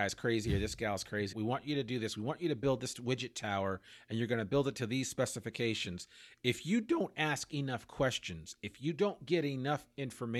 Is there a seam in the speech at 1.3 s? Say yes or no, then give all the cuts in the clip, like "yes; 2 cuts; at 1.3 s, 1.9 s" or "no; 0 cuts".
yes; 1 cut; at 1.3 s